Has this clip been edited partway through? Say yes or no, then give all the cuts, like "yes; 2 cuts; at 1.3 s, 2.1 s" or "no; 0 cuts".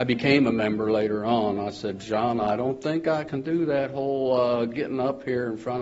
no; 0 cuts